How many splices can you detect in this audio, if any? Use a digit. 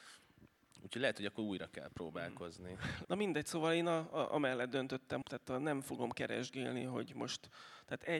2